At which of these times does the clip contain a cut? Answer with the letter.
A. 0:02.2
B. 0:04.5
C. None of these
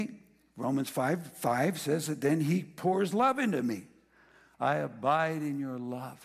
B